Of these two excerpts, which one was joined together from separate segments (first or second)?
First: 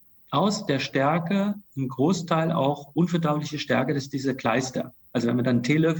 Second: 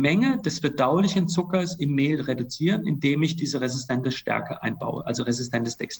first